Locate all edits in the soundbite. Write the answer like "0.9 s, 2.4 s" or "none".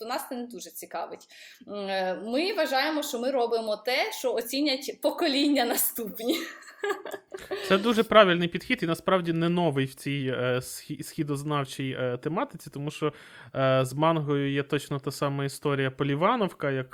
none